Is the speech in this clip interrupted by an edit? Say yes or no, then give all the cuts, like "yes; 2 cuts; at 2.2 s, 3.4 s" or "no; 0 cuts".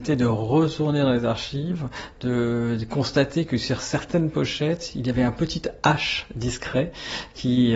no; 0 cuts